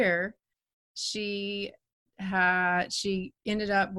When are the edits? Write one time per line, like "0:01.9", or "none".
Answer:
none